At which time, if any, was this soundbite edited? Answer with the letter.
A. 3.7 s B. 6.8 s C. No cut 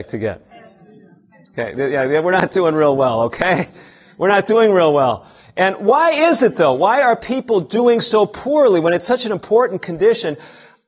C